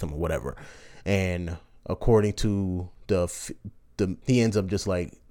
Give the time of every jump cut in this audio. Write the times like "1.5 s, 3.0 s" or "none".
4.2 s